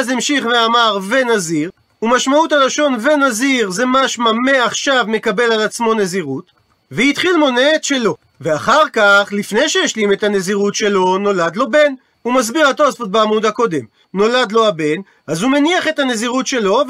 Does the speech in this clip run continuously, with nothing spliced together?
no; 2 cuts; at 12.1 s, 14.0 s

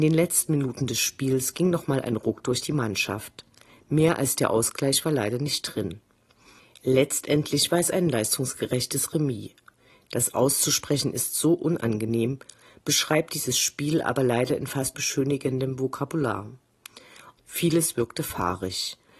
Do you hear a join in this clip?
yes; 2 cuts; at 14.9 s, 17.4 s

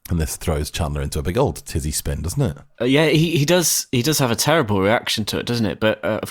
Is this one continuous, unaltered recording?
yes; 0 cuts

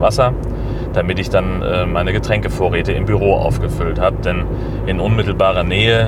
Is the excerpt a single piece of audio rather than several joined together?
yes; 0 cuts

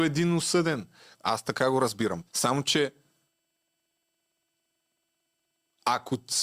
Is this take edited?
yes; 2 cuts; at 1.1 s, 2.3 s

